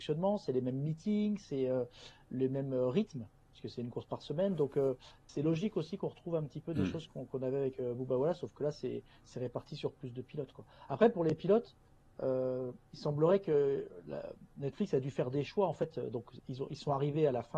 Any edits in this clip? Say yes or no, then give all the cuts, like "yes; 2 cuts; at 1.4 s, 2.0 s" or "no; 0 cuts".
no; 0 cuts